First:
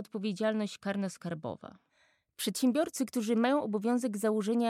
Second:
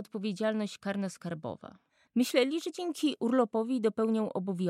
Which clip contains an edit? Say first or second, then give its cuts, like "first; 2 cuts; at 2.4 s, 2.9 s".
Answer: second; 1 cut; at 2.0 s